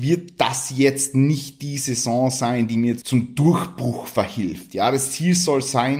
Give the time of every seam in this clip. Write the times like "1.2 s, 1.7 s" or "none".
3.0 s